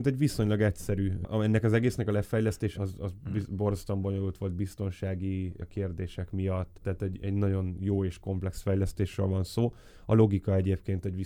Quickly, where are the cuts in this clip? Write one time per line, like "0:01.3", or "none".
0:02.7
0:06.8